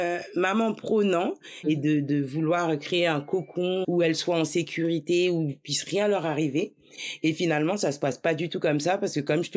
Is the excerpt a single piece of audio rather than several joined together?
no; 2 cuts; at 1.6 s, 3.8 s

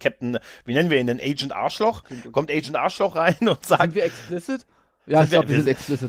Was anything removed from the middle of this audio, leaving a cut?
yes; 1 cut; at 2.0 s

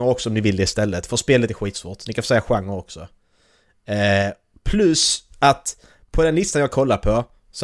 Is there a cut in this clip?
no; 0 cuts

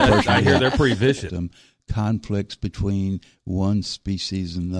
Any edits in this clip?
yes; 1 cut; at 1.3 s

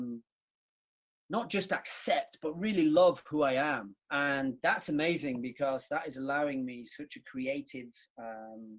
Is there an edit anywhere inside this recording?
yes; 1 cut; at 4.0 s

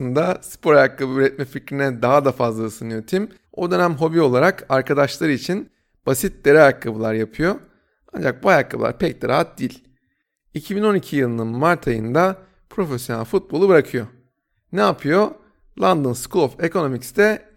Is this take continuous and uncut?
no; 1 cut; at 3.4 s

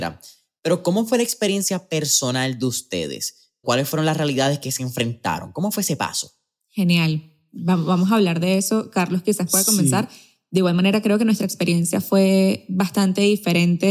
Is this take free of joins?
no; 1 cut; at 3.6 s

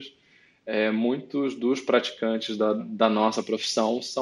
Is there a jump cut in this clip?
yes; 1 cut; at 2.8 s

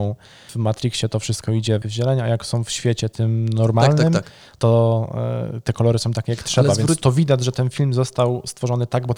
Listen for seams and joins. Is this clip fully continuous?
yes; 0 cuts

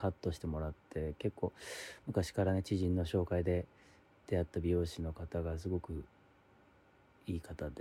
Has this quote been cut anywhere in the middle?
no; 0 cuts

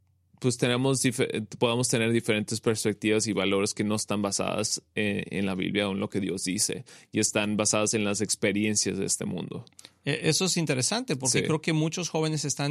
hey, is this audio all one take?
yes; 0 cuts

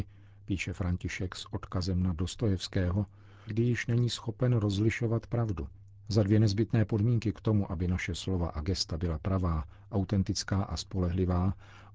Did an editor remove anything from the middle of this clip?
yes; 2 cuts; at 3.5 s, 6.0 s

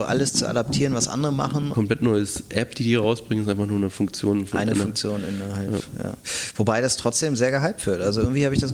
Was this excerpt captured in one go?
no; 1 cut; at 1.7 s

